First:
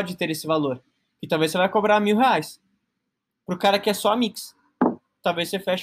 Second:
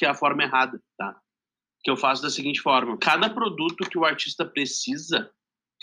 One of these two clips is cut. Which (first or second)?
second